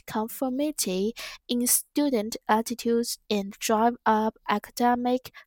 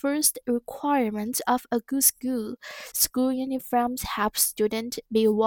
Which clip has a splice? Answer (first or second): second